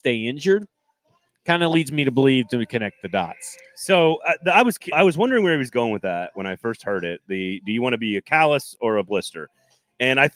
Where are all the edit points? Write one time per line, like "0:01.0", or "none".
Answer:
0:04.9